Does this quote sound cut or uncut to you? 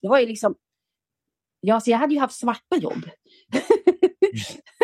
uncut